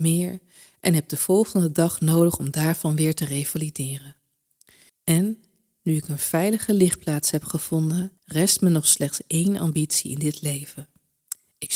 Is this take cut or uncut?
cut